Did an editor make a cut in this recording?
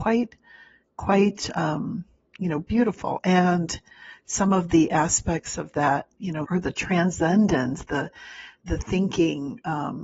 yes; 1 cut; at 6.4 s

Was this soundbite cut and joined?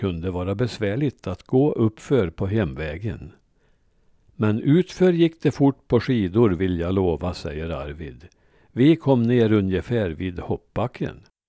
no; 0 cuts

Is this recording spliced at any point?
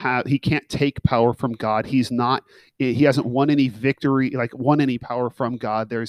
no; 0 cuts

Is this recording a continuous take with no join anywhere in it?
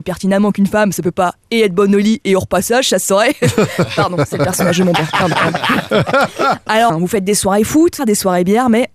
no; 2 cuts; at 6.9 s, 8.0 s

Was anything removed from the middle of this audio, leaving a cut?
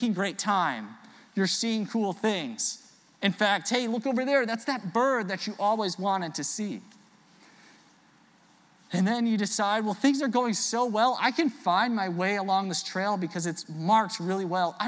no; 0 cuts

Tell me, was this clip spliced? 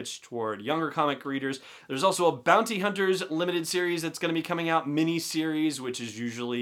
no; 0 cuts

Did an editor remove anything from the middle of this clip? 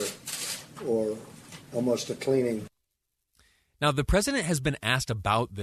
no; 0 cuts

